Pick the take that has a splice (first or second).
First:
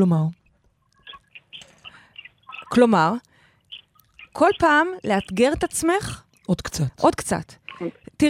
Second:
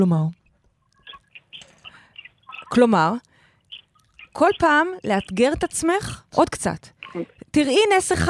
second